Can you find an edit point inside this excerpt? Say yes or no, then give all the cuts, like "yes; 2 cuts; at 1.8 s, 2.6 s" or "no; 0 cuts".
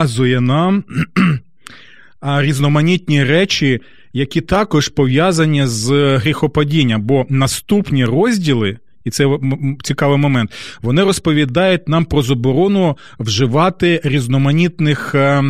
no; 0 cuts